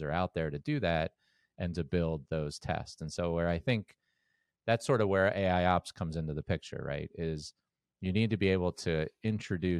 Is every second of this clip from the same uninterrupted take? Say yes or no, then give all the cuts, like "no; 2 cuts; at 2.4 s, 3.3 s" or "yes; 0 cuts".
yes; 0 cuts